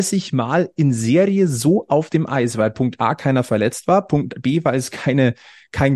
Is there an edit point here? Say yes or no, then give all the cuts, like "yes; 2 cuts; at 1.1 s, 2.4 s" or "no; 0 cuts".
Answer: no; 0 cuts